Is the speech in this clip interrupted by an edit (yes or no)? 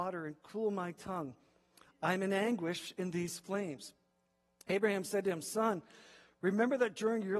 no